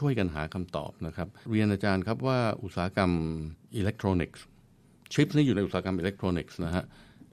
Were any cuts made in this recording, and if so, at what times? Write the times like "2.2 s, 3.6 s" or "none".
1.5 s, 3.6 s